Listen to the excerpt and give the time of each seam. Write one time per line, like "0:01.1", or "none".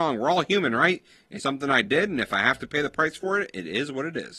0:01.4